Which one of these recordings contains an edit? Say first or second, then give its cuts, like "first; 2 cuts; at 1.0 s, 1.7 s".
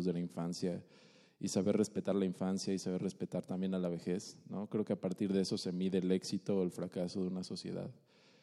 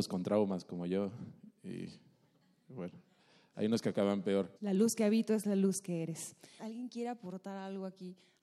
second; 2 cuts; at 4.6 s, 6.6 s